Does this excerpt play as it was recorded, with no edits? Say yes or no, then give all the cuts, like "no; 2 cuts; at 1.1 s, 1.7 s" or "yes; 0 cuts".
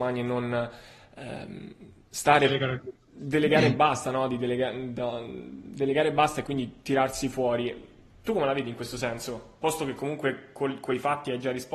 yes; 0 cuts